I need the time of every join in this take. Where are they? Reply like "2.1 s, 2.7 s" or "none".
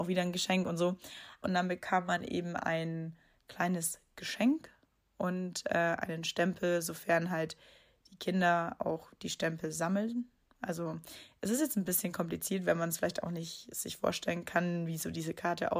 1.4 s